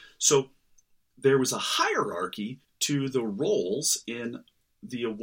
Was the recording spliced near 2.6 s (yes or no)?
yes